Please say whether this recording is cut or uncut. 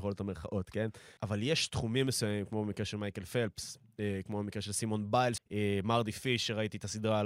cut